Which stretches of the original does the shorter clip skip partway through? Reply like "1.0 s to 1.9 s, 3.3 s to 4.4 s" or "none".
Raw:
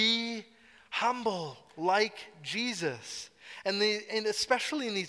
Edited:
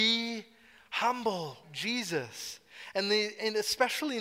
1.6 s to 2.3 s